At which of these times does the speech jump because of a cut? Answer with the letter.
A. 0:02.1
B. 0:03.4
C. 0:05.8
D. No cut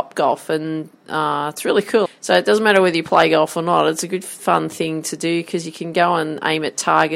A